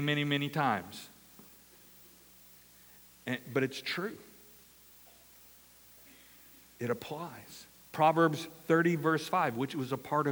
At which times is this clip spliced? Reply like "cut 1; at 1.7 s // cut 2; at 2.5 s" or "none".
none